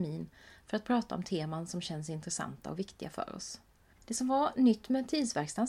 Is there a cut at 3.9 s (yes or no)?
yes